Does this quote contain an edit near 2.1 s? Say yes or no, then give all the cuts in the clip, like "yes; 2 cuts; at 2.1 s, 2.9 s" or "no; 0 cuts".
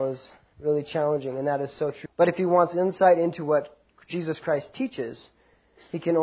yes; 1 cut; at 2.1 s